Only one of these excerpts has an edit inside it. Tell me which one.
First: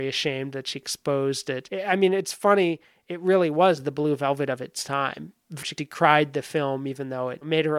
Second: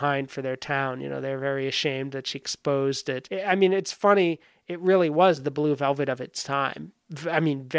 first; 1 cut; at 5.6 s

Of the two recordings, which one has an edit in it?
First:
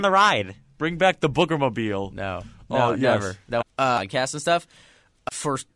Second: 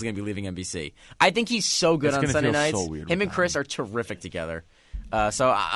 first; 1 cut; at 3.6 s

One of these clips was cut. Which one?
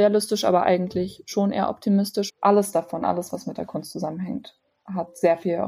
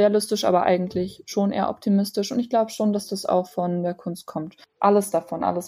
first; 1 cut; at 2.3 s

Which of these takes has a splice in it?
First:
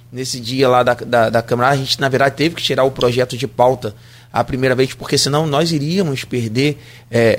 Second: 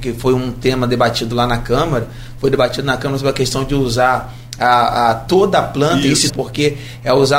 second; 1 cut; at 6.3 s

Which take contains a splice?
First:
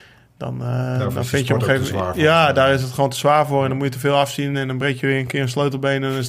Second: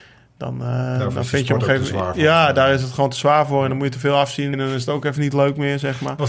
second; 1 cut; at 4.5 s

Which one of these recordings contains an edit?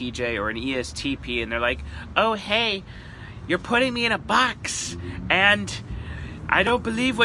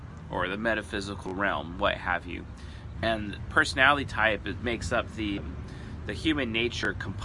second; 2 cuts; at 2.9 s, 5.4 s

